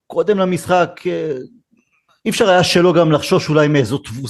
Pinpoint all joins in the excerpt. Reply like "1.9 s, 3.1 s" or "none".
none